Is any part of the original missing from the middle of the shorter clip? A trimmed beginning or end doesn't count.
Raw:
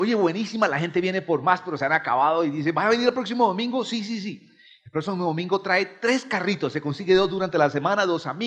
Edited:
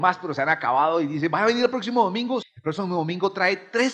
yes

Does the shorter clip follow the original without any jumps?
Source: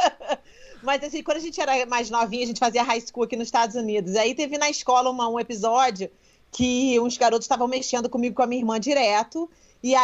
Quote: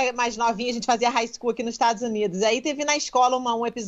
yes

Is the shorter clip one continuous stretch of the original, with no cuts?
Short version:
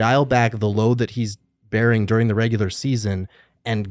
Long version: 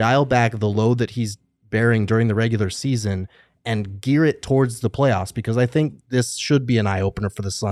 yes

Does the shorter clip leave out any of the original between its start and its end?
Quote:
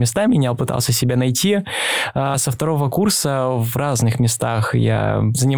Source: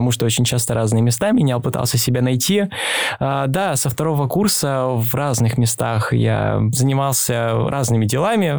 yes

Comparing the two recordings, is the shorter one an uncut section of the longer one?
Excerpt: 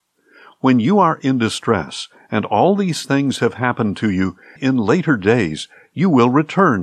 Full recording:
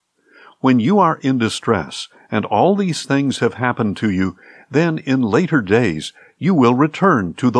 no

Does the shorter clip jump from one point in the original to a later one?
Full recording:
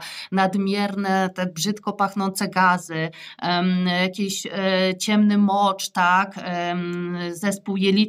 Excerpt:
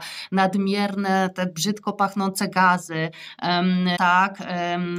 yes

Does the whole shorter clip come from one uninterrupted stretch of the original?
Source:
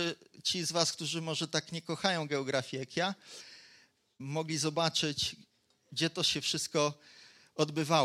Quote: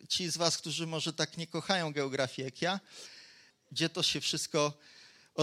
no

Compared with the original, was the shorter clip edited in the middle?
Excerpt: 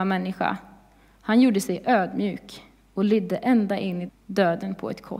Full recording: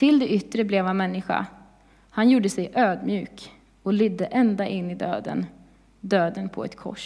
yes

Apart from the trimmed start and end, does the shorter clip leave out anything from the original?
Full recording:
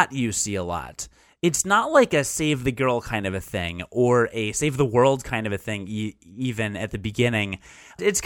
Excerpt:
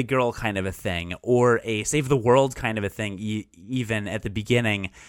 no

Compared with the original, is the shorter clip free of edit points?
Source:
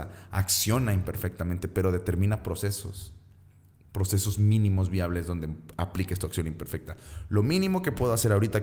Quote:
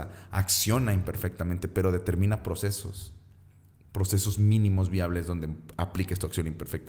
yes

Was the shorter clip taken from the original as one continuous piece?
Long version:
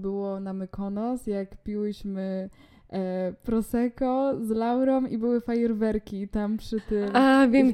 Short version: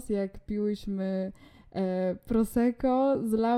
yes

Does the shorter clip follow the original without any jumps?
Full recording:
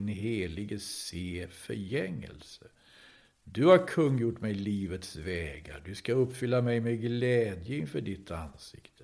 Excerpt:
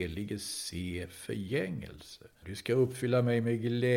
no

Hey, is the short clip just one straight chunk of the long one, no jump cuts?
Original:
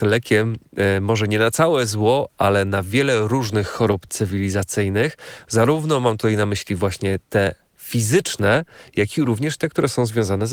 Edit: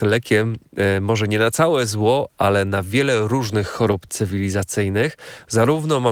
yes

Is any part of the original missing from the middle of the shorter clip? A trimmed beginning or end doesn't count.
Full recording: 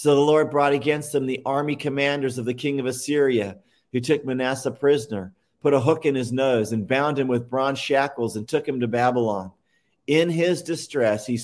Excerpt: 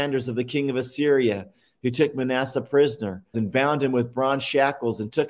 yes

